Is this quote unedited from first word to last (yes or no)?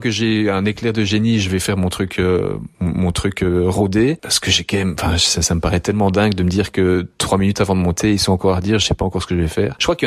yes